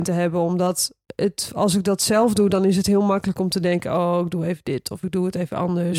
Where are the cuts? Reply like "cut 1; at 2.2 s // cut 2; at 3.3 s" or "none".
none

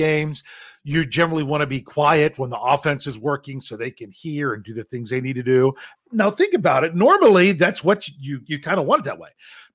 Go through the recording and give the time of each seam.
cut 1; at 5.9 s

